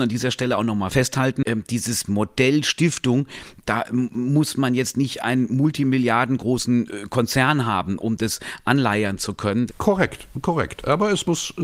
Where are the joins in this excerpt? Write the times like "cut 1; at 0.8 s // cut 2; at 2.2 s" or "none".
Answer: cut 1; at 9.7 s